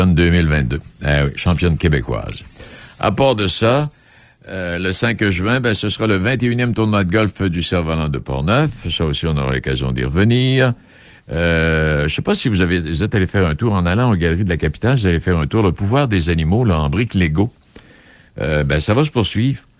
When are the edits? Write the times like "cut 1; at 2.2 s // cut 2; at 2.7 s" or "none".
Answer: none